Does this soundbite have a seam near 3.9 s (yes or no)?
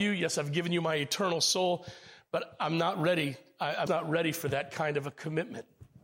yes